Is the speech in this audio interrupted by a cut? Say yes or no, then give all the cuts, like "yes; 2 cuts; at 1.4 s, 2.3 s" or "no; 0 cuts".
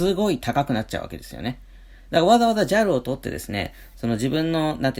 no; 0 cuts